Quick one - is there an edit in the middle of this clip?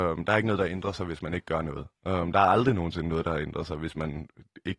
no; 0 cuts

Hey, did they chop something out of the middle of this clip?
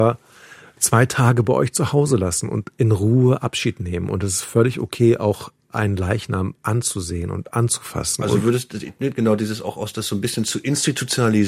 no; 0 cuts

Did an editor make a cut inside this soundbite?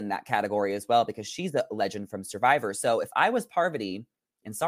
no; 0 cuts

